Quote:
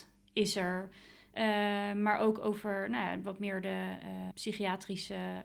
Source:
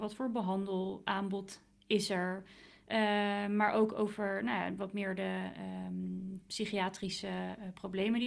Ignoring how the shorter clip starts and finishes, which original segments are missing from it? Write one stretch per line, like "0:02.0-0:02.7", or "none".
0:05.8-0:06.4

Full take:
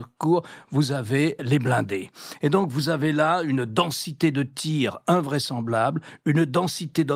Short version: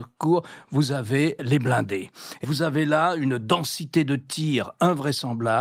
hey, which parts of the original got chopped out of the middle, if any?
0:02.4-0:02.7

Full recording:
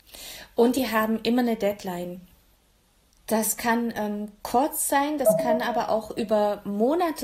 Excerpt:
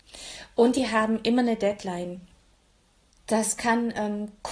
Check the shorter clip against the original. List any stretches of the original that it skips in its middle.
none

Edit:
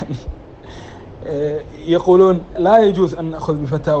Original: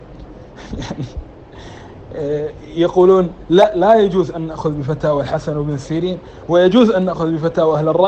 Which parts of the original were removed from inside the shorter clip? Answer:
0:03.4-0:03.7

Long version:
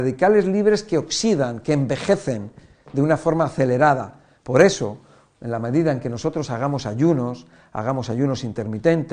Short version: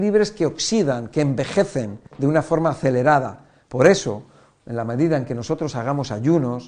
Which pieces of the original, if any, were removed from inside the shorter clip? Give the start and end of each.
0:02.6-0:02.8

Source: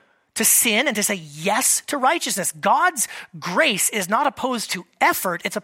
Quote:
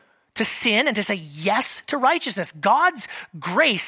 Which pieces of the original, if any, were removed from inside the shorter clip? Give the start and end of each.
none

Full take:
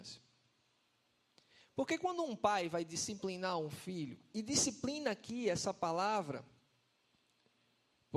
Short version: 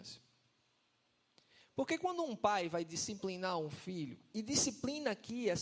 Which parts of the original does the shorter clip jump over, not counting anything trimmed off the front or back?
none

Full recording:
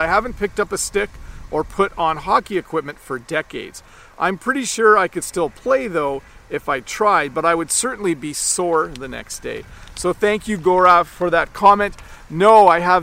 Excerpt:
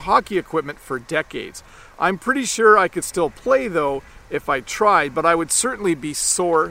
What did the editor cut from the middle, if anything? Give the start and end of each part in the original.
none

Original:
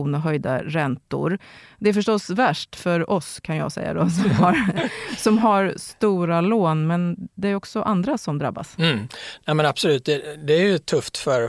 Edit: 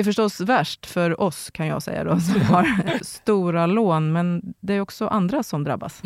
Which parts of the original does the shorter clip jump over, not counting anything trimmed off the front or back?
0:04.9-0:05.7

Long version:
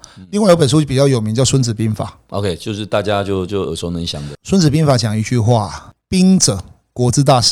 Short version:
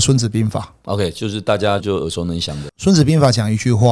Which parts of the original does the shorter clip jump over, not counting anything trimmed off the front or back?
0:03.2-0:03.5

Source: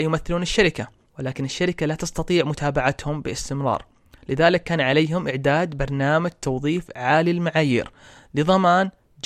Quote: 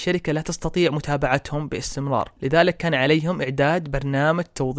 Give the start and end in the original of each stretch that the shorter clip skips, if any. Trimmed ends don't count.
0:03.9-0:04.2

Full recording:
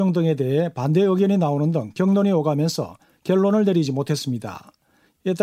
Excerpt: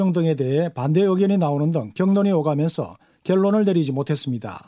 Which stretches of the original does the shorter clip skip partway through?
none

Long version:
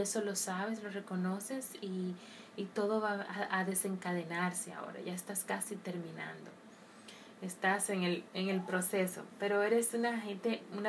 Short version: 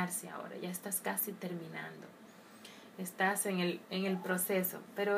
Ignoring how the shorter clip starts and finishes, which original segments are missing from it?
none

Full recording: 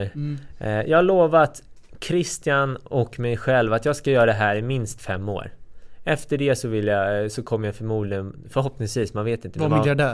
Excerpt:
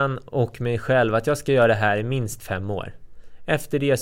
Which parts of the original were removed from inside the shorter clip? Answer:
none

